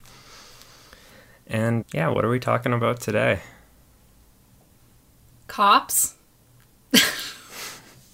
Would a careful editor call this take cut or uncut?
cut